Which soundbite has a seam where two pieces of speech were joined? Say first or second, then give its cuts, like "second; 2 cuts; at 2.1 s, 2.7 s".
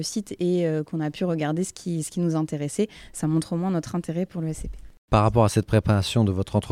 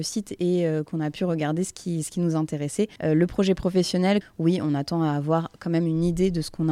second; 2 cuts; at 3.0 s, 4.2 s